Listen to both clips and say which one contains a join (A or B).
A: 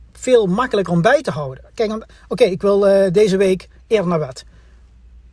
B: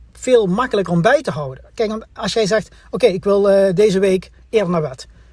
A